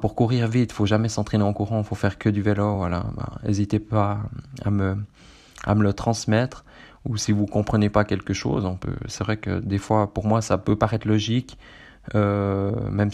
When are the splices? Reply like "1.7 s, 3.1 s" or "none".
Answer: none